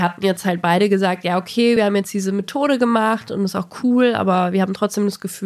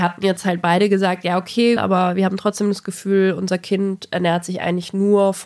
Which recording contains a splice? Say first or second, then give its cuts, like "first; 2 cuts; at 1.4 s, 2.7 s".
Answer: second; 1 cut; at 1.8 s